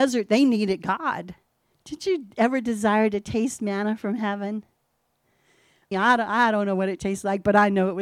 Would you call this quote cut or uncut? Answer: cut